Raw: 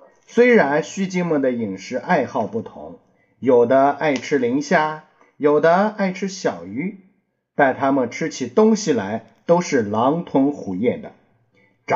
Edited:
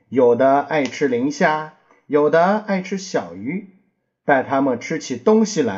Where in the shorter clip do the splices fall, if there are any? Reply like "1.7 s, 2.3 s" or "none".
none